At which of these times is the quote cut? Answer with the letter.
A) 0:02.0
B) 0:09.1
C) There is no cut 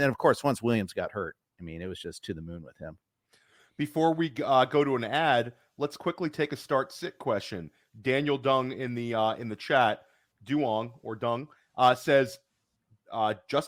C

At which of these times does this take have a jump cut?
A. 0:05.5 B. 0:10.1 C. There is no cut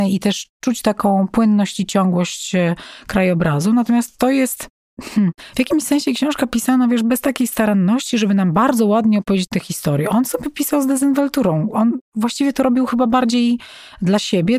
C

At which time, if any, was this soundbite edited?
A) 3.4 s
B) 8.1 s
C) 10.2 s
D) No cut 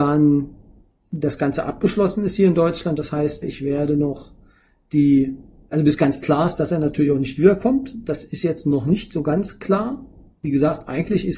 A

